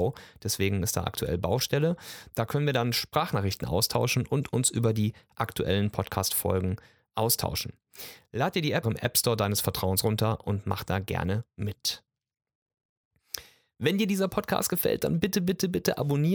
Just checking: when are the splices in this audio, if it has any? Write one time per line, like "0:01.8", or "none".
0:08.8